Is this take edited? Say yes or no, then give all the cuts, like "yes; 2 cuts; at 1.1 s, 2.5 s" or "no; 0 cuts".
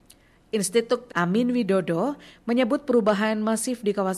yes; 1 cut; at 1.1 s